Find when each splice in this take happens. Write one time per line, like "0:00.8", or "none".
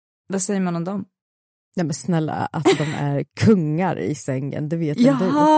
none